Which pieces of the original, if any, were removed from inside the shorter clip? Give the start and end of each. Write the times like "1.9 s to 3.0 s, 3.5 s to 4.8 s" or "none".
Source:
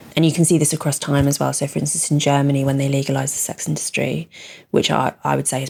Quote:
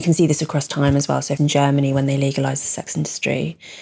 1.7 s to 2.1 s